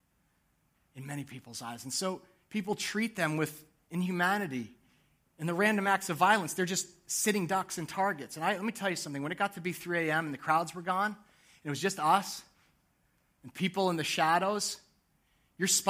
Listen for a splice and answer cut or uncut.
uncut